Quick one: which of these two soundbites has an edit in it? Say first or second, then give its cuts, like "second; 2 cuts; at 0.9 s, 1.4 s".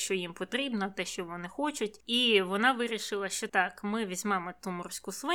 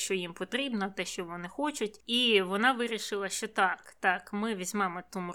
first; 1 cut; at 3.5 s